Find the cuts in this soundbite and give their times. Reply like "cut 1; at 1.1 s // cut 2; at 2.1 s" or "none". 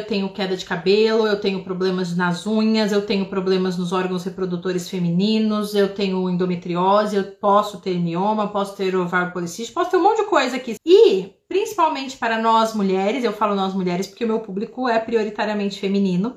cut 1; at 10.8 s